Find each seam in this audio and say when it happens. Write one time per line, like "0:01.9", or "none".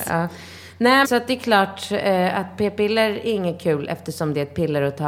0:01.0